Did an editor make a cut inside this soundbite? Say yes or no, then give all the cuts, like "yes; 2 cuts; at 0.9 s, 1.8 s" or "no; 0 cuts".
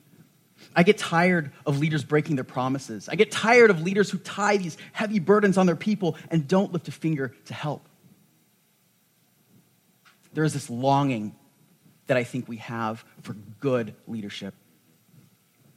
no; 0 cuts